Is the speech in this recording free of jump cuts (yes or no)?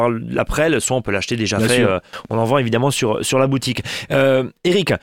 yes